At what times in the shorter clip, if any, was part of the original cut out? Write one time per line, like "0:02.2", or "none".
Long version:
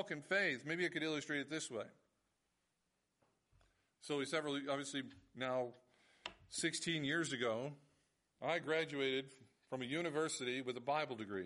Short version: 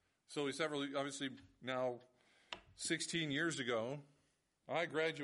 none